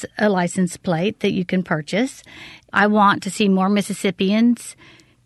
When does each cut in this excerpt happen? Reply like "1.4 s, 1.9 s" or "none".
2.7 s